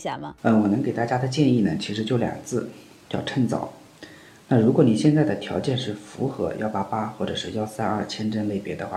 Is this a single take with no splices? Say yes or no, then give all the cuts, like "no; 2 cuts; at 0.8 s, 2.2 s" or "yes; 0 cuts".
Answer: yes; 0 cuts